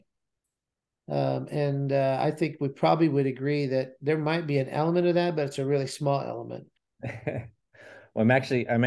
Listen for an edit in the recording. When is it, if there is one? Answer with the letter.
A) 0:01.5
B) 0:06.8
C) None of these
B